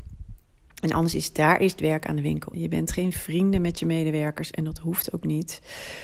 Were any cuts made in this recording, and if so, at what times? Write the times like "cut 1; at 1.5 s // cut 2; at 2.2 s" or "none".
cut 1; at 2.5 s